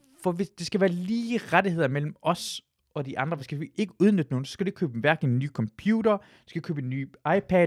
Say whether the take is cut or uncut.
uncut